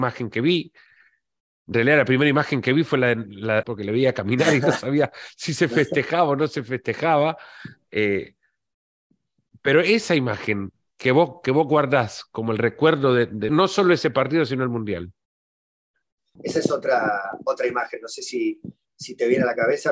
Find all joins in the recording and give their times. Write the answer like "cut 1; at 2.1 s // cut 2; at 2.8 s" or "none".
cut 1; at 3.6 s // cut 2; at 13.5 s // cut 3; at 16.4 s